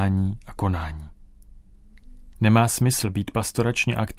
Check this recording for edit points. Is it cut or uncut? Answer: cut